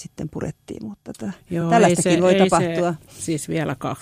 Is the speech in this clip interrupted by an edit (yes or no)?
no